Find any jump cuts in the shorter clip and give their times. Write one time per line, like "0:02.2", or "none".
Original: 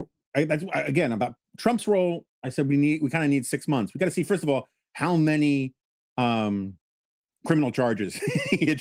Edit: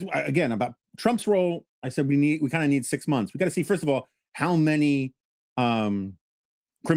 none